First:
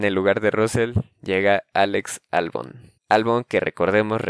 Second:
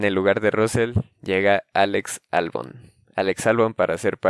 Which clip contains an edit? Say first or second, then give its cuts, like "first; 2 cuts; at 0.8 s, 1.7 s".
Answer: first; 1 cut; at 3.0 s